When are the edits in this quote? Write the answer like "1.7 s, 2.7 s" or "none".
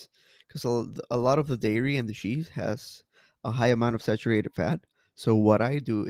none